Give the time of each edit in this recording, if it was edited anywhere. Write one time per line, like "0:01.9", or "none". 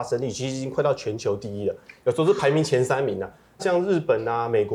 0:03.6